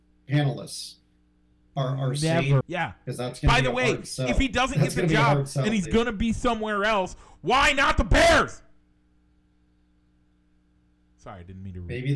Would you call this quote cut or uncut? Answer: cut